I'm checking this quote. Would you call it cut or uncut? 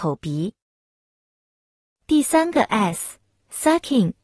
uncut